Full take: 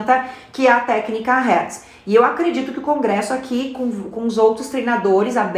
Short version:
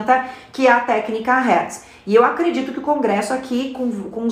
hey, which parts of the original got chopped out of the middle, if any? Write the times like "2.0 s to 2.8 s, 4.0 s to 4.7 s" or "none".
none